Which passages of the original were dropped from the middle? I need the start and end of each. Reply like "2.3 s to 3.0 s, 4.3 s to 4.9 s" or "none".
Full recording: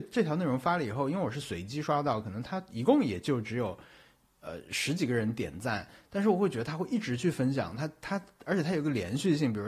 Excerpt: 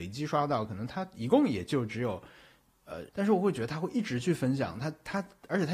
4.6 s to 6.1 s